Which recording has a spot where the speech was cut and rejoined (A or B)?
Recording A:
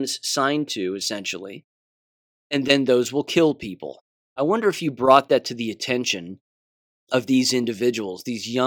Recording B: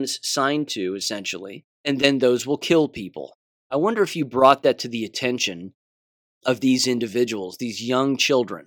B